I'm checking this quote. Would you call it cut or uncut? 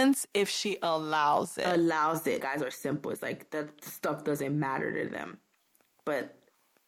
cut